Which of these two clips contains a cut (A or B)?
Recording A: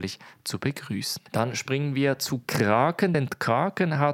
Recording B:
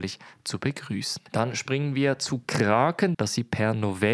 B